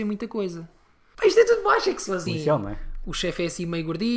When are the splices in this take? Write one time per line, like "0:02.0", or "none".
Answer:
0:01.1
0:02.3